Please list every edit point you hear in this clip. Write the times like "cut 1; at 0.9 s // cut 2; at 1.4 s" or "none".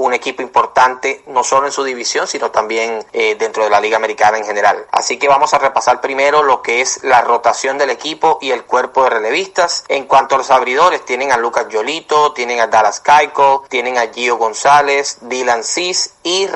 none